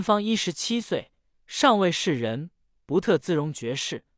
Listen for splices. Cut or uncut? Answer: uncut